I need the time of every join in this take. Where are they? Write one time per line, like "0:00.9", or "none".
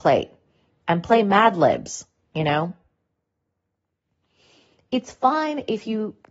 none